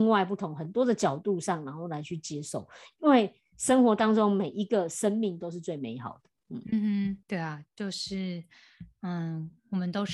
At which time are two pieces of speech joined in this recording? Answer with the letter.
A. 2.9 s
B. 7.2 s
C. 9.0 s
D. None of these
B